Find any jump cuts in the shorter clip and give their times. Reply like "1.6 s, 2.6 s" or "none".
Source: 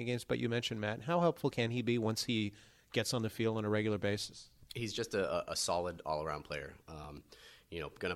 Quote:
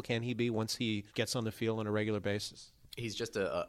1.1 s